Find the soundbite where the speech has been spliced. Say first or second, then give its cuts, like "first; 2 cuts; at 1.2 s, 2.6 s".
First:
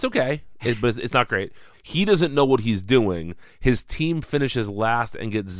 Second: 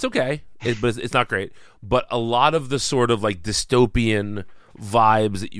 first; 1 cut; at 1.7 s